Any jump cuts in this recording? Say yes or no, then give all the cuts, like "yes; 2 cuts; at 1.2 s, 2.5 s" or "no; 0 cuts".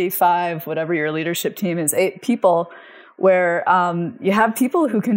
no; 0 cuts